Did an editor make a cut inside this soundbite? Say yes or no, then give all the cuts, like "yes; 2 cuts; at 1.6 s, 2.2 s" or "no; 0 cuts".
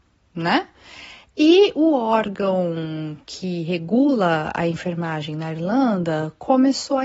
no; 0 cuts